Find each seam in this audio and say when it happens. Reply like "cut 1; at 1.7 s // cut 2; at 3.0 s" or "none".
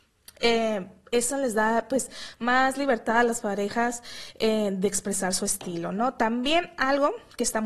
none